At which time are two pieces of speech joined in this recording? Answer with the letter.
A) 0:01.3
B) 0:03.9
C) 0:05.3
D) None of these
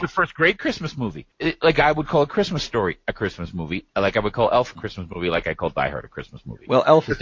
A